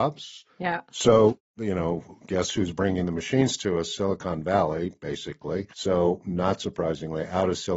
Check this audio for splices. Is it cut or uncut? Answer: cut